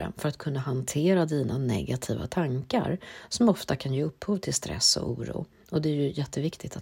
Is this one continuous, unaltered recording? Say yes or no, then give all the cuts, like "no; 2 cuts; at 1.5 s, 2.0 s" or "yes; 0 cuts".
yes; 0 cuts